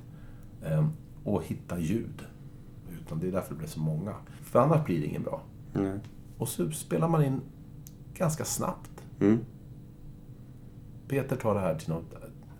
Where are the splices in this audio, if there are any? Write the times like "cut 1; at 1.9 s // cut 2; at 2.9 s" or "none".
cut 1; at 2.9 s // cut 2; at 4.4 s

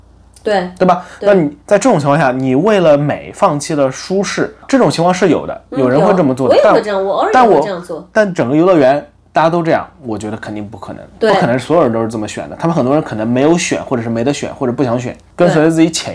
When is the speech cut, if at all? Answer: none

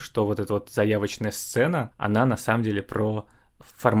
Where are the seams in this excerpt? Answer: cut 1; at 1.9 s

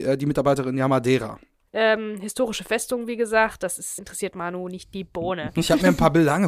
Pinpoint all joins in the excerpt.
cut 1; at 1.7 s // cut 2; at 4.0 s

